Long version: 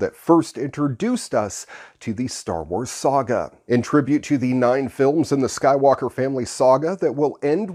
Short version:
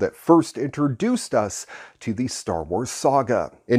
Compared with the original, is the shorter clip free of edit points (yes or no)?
yes